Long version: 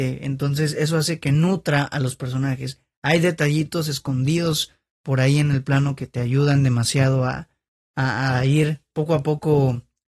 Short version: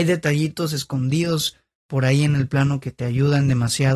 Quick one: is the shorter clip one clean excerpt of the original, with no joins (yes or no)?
yes